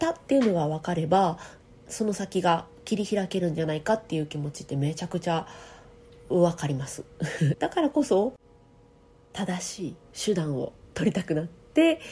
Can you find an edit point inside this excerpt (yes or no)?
yes